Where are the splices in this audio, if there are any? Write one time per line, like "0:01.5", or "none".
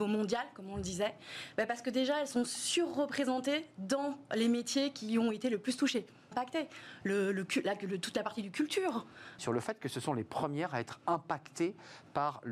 0:06.3
0:09.4